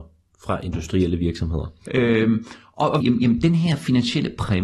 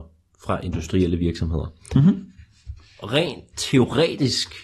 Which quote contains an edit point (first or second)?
first